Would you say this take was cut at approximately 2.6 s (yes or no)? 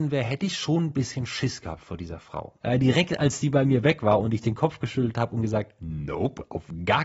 yes